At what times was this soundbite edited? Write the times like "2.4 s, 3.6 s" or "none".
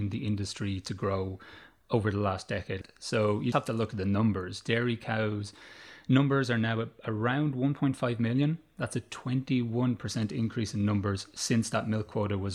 3.5 s